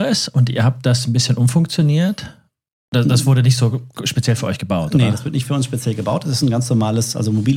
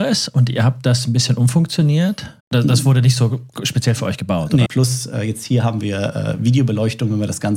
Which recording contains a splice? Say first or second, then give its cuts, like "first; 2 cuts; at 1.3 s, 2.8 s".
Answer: second; 2 cuts; at 2.4 s, 4.7 s